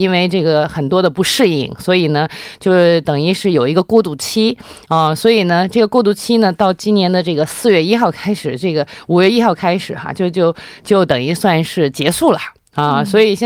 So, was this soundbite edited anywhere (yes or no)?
no